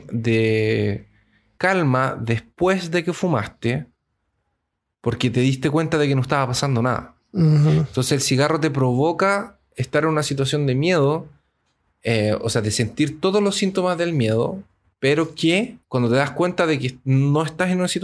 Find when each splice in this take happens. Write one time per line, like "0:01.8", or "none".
0:01.6
0:15.8